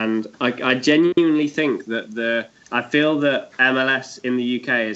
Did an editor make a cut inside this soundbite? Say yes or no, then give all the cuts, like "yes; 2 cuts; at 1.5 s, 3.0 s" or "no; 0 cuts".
yes; 1 cut; at 2.6 s